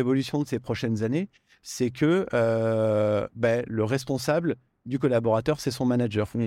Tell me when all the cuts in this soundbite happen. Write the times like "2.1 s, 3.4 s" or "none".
none